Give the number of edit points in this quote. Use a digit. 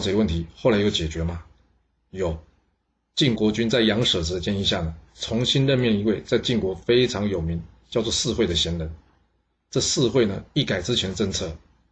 1